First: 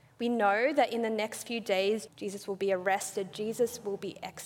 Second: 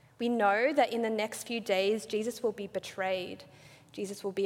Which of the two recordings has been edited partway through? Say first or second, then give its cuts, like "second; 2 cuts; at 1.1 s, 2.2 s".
first; 1 cut; at 2.1 s